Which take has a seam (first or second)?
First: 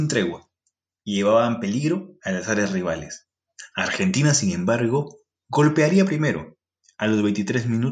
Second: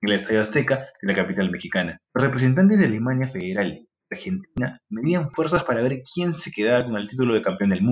second